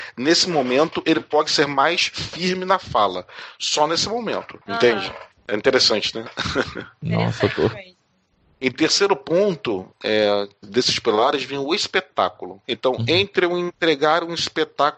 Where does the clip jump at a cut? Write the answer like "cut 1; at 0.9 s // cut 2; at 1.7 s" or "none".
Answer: cut 1; at 10.6 s // cut 2; at 12.6 s